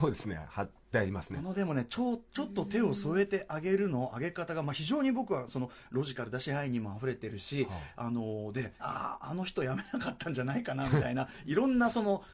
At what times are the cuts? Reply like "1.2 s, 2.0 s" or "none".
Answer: 1.3 s, 8.8 s